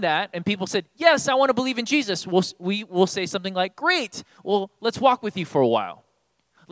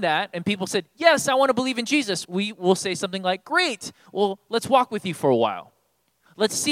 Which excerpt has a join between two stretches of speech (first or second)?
second